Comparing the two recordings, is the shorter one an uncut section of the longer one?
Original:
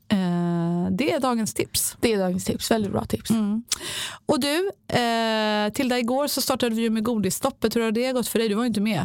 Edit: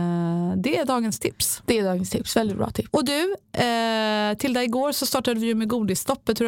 no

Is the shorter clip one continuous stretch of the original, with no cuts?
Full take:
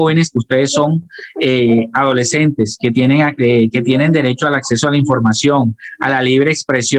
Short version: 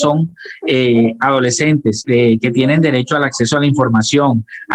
no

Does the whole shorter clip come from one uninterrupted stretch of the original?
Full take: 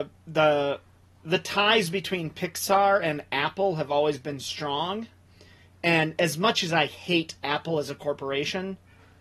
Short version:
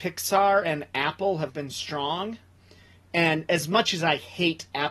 no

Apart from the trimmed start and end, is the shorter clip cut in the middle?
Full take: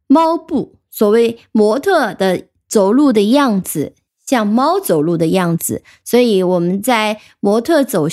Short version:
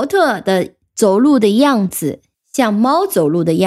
no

